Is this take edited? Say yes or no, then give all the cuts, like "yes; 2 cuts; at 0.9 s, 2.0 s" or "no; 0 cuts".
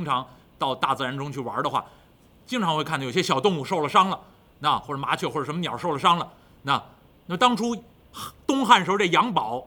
no; 0 cuts